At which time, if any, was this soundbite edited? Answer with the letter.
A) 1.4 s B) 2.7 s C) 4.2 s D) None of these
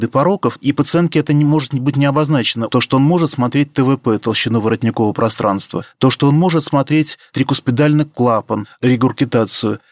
B